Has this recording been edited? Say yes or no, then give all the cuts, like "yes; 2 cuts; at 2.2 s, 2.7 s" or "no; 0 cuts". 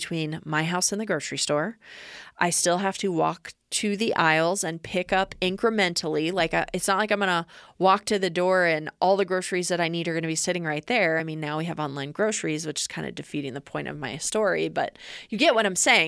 no; 0 cuts